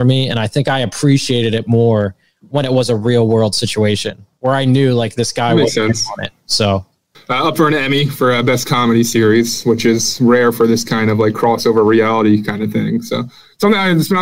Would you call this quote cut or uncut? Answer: cut